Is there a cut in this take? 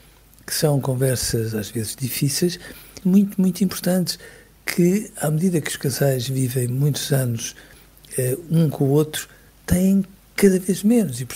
yes; 1 cut; at 3.0 s

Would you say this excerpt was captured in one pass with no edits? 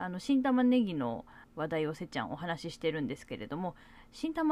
no; 1 cut; at 1.4 s

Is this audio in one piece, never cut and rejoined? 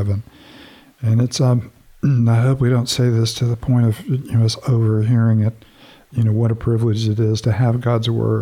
yes; 0 cuts

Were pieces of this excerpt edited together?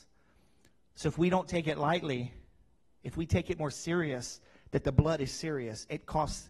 no; 0 cuts

